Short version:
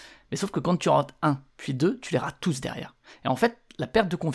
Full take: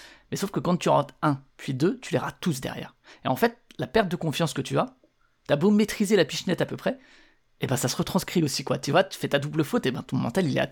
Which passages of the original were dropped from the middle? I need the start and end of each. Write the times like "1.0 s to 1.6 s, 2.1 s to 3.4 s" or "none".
none